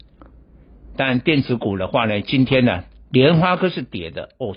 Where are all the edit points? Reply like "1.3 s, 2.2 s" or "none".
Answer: 0.9 s, 3.0 s

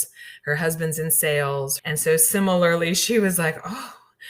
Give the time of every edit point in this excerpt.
1.8 s

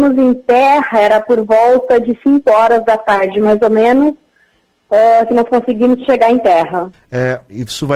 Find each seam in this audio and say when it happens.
6.9 s

